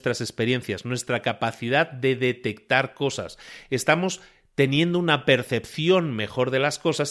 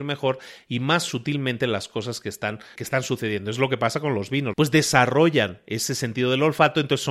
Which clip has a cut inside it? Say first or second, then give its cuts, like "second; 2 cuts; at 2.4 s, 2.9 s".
second; 2 cuts; at 2.7 s, 4.5 s